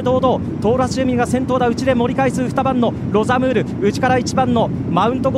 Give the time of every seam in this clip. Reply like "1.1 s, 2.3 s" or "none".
none